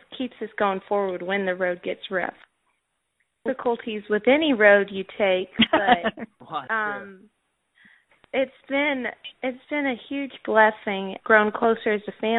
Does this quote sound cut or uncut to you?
cut